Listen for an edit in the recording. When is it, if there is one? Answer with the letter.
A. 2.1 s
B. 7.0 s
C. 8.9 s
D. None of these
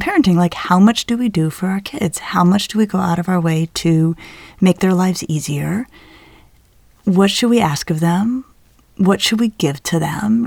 D